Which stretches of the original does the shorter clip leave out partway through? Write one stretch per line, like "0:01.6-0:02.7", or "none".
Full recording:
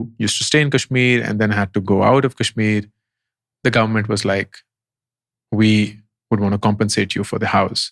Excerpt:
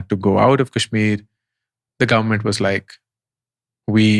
none

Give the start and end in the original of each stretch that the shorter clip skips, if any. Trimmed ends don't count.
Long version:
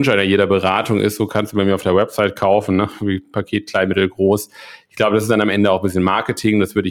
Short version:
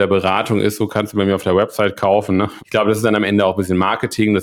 0:03.0-0:04.8

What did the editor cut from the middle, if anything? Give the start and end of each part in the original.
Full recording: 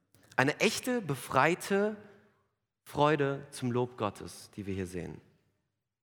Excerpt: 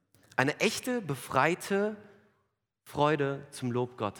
none

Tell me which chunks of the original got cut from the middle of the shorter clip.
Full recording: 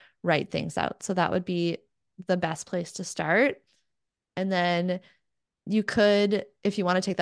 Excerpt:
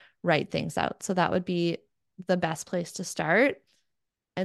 none

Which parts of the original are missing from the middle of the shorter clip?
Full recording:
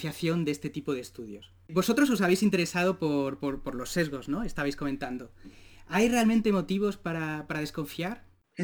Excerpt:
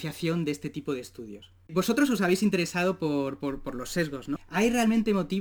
0:04.4-0:05.7

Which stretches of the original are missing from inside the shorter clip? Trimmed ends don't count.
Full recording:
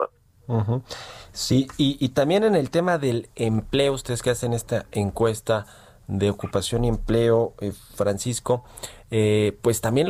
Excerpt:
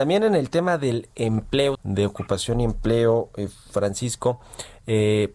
0:04.0-0:06.0

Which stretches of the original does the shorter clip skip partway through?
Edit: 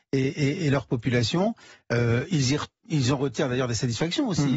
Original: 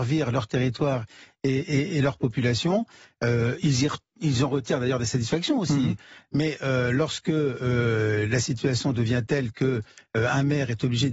none

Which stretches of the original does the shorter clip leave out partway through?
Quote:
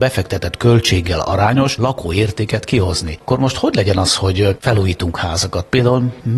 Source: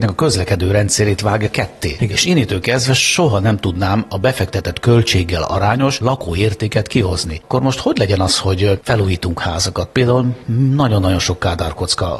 none

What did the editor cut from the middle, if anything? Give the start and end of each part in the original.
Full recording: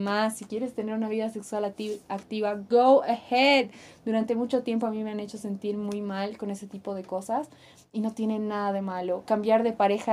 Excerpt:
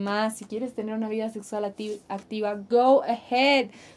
none

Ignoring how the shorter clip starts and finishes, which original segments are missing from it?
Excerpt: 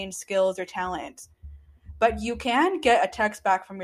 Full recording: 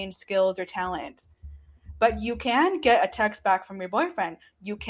none

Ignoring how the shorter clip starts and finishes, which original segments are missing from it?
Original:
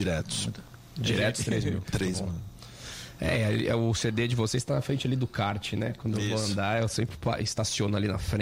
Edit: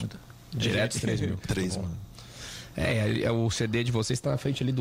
none

